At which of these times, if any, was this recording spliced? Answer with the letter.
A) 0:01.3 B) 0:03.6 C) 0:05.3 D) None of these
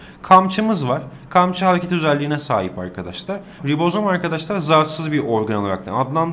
B